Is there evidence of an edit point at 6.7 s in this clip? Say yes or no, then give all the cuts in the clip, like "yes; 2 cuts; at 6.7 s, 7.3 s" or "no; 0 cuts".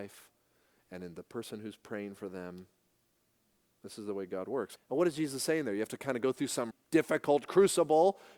yes; 2 cuts; at 4.8 s, 6.7 s